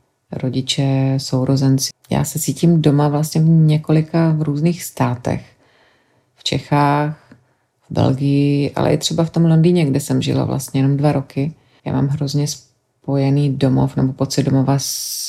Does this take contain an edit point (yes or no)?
yes